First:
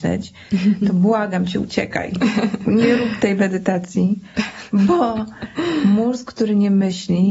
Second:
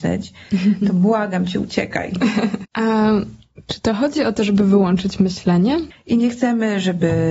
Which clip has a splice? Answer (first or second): second